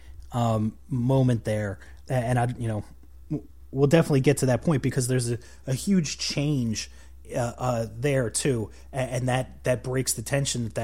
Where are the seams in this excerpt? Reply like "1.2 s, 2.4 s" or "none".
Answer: 2.0 s